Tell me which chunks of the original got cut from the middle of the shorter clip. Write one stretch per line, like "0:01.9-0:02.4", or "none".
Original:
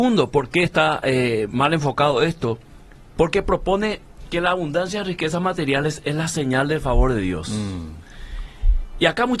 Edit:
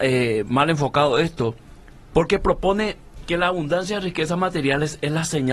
none